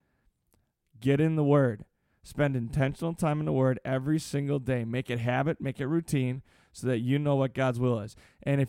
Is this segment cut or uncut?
uncut